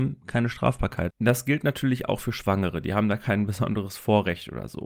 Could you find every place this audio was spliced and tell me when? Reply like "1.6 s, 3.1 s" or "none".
1.1 s